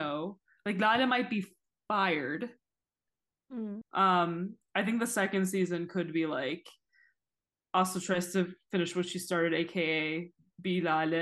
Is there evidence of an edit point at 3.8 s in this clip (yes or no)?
yes